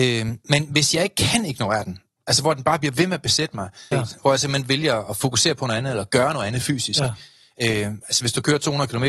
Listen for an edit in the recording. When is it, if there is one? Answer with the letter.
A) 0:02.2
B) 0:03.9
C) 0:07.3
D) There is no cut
B